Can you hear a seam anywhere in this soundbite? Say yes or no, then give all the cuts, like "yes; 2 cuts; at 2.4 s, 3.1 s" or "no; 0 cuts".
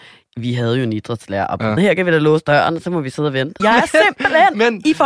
yes; 2 cuts; at 1.8 s, 3.6 s